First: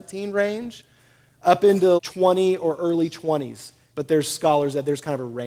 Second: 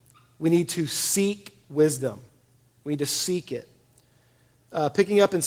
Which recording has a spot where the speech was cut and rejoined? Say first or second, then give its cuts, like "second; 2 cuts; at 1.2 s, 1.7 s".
first; 2 cuts; at 2.0 s, 3.9 s